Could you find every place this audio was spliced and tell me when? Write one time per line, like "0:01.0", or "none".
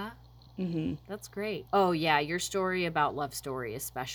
0:01.7